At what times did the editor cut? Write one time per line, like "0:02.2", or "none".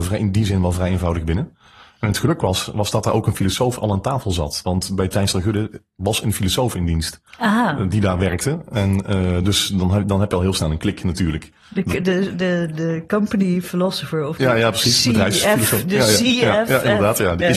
none